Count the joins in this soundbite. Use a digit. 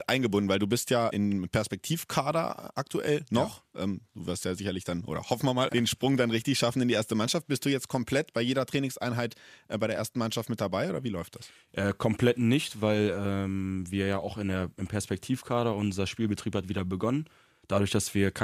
2